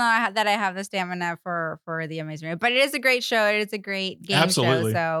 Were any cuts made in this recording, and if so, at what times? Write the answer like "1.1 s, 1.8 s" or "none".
none